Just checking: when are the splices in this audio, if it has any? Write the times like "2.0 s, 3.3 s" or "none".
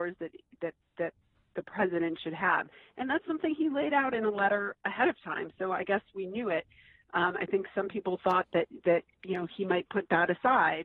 none